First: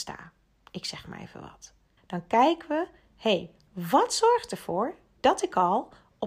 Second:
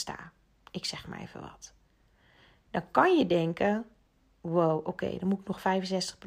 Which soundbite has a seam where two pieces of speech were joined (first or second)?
first